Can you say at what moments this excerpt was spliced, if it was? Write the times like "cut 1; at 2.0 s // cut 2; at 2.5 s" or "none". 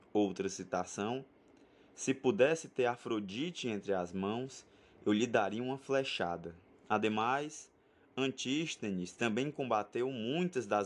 cut 1; at 6.7 s